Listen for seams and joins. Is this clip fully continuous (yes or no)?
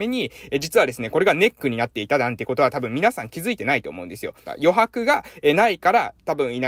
no